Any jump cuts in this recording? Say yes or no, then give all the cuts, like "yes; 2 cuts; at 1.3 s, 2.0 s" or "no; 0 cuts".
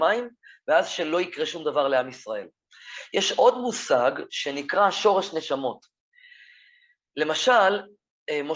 no; 0 cuts